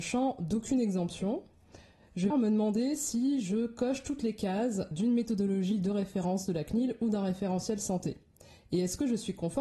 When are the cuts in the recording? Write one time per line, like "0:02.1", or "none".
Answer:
0:02.3
0:04.9